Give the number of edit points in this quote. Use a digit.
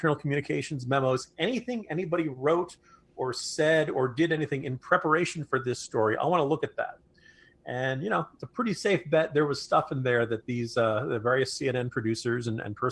0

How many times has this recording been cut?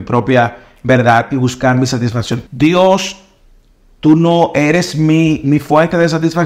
2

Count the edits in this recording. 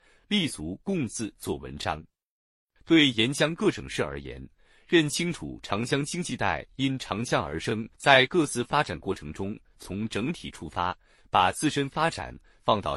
1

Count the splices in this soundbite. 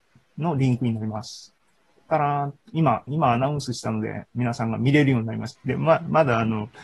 2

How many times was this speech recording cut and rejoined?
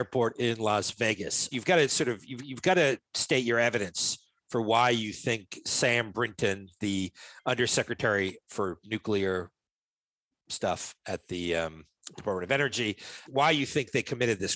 3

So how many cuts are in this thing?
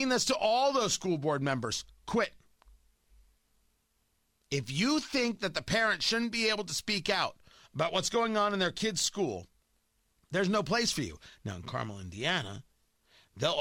0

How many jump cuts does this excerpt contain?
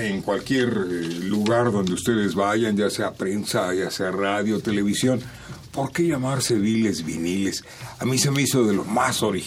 0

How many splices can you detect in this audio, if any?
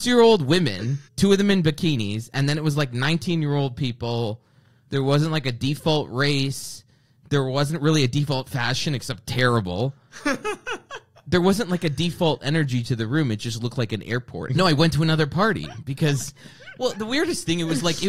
2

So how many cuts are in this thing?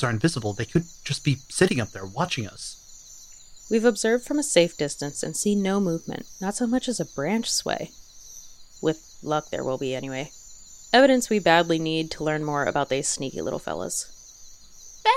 1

